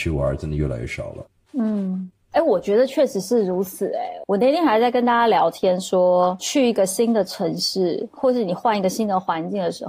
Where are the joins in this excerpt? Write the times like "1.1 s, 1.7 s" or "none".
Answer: none